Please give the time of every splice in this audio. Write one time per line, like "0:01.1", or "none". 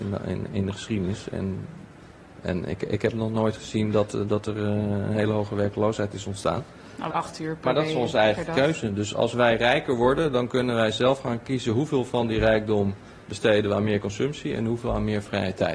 0:07.1